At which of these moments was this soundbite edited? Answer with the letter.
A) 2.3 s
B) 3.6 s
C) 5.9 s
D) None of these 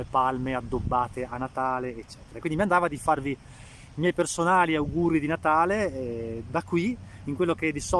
D